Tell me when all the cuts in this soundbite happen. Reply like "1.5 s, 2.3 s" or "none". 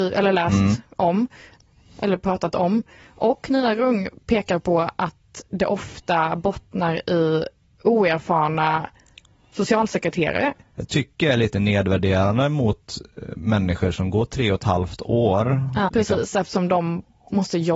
15.9 s